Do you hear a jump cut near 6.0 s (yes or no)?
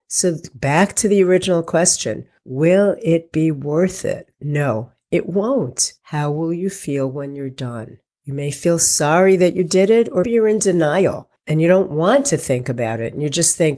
yes